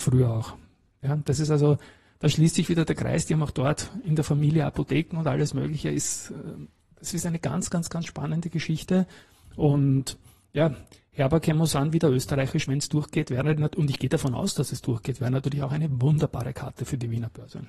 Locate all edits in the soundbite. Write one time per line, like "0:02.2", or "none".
none